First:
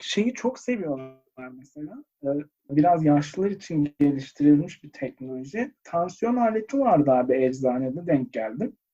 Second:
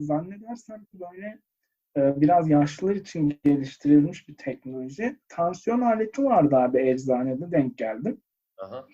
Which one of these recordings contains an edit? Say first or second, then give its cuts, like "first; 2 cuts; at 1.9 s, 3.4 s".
first; 1 cut; at 2.7 s